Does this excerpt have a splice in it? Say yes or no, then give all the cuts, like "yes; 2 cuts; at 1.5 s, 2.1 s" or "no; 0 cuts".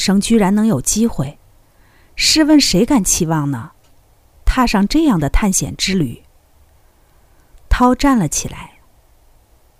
no; 0 cuts